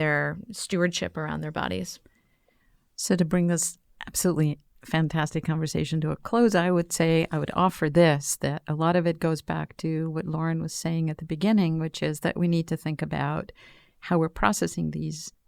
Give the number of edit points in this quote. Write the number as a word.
zero